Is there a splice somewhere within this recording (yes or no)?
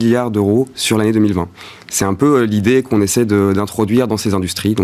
yes